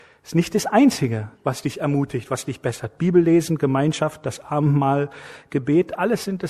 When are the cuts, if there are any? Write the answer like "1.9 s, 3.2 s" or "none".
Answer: 1.3 s